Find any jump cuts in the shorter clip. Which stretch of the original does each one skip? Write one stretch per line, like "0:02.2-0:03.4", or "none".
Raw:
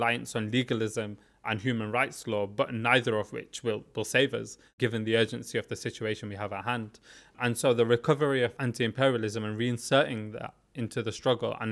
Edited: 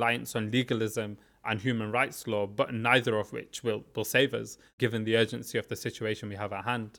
none